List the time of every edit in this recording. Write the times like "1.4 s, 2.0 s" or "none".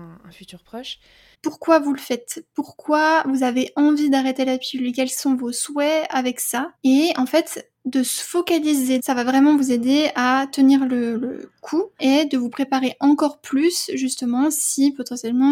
1.3 s, 6.8 s, 9.0 s